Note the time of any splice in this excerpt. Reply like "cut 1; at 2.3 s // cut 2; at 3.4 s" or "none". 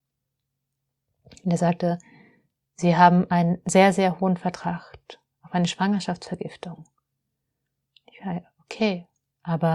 none